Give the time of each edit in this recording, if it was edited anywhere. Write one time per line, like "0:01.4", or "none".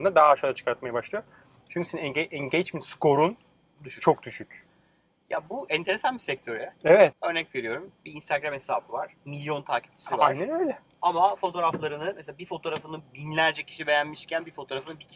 0:07.1